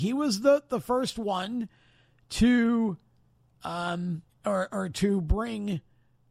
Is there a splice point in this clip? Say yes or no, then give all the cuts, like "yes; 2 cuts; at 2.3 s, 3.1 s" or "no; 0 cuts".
yes; 1 cut; at 4.3 s